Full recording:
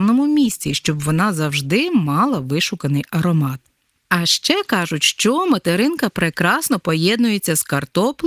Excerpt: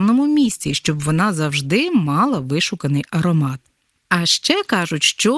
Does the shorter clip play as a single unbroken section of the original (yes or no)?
yes